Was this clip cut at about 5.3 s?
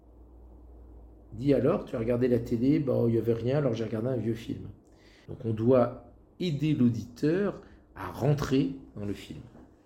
yes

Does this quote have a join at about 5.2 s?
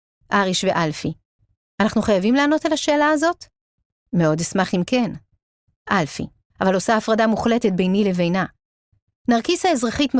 no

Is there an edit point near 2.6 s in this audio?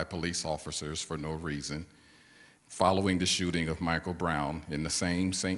yes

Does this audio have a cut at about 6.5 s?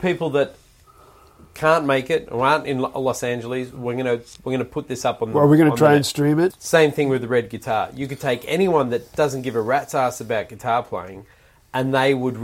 yes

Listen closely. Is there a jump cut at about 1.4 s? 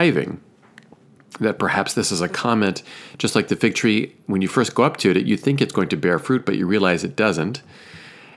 no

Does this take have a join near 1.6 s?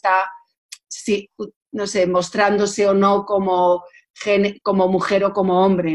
no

